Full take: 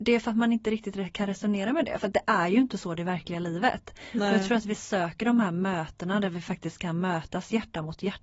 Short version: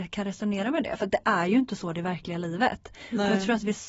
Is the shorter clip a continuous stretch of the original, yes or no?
yes